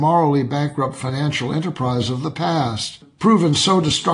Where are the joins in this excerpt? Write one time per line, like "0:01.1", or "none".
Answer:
none